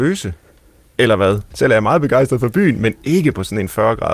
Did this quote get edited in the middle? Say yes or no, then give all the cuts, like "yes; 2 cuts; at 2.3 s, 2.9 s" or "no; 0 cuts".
yes; 1 cut; at 1.5 s